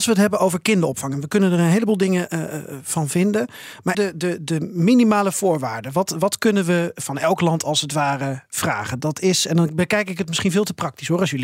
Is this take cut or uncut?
cut